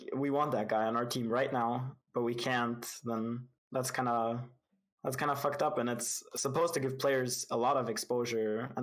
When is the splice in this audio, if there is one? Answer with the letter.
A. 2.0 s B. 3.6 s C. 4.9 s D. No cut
B